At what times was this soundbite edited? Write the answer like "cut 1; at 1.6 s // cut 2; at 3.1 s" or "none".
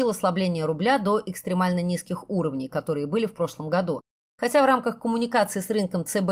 cut 1; at 4.3 s